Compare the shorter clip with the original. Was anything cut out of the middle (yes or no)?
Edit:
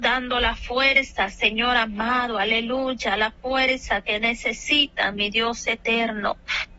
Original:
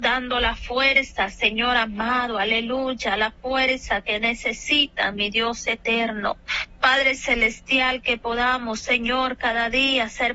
no